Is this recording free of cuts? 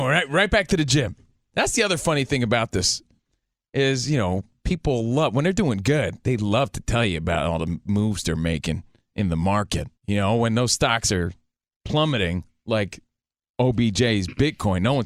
no; 2 cuts; at 1.5 s, 10.0 s

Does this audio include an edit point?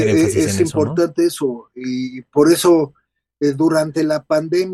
no; 0 cuts

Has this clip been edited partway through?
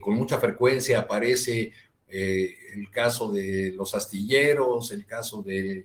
no; 0 cuts

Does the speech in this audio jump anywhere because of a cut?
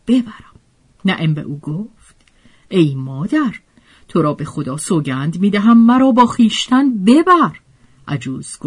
yes; 1 cut; at 1.0 s

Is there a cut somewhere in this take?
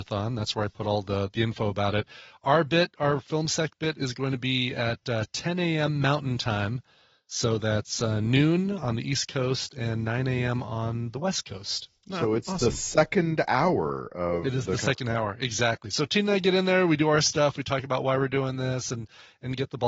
no; 0 cuts

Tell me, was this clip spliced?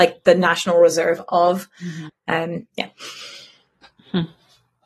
yes; 1 cut; at 2.1 s

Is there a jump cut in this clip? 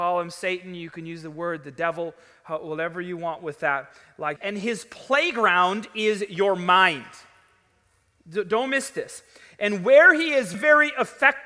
yes; 2 cuts; at 4.4 s, 10.5 s

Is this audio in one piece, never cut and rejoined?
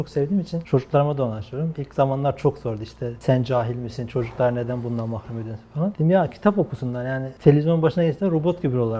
yes; 0 cuts

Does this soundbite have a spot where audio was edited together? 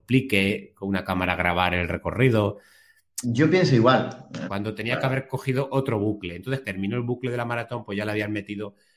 yes; 3 cuts; at 3.2 s, 4.5 s, 6.6 s

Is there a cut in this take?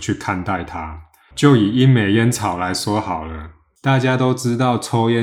yes; 1 cut; at 1.3 s

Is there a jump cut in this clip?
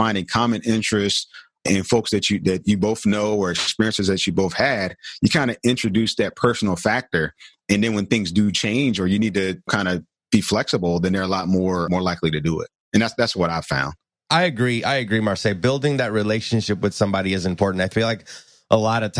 no; 0 cuts

